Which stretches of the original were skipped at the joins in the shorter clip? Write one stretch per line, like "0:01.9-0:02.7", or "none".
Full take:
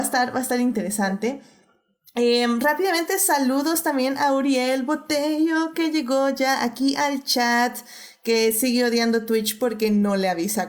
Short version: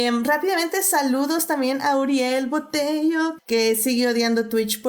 0:05.7-0:08.1